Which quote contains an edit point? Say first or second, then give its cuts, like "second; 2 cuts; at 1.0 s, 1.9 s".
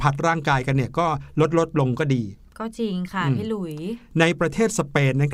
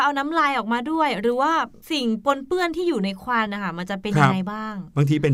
second; 1 cut; at 3.5 s